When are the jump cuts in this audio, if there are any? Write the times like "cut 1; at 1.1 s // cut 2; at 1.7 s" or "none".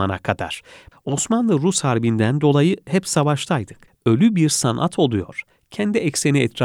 cut 1; at 0.9 s // cut 2; at 3.9 s